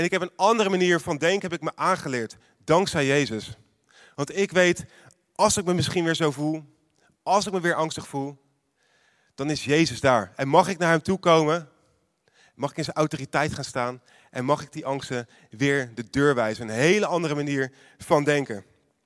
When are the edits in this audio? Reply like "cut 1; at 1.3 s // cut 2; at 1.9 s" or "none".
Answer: none